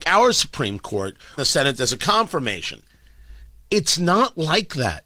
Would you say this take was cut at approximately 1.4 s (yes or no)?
yes